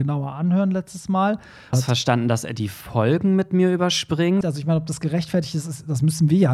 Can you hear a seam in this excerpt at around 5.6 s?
no; 2 cuts; at 1.7 s, 4.4 s

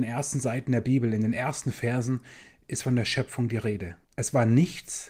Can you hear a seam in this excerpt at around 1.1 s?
no; 1 cut; at 4.0 s

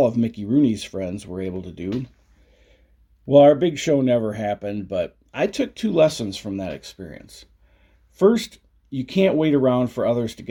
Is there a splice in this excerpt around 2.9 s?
no; 0 cuts

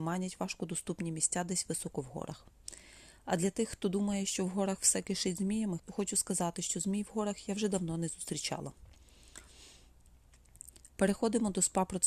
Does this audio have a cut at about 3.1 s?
no; 1 cut; at 5.8 s

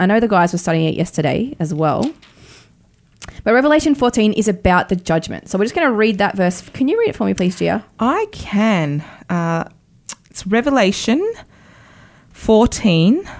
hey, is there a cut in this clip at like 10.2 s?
no; 0 cuts

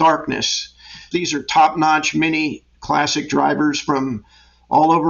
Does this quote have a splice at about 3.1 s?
no; 1 cut; at 1.1 s

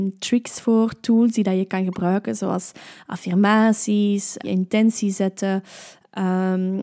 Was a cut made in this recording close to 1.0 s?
no; 1 cut; at 4.4 s

